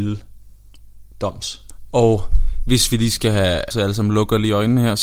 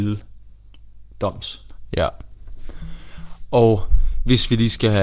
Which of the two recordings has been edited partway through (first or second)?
first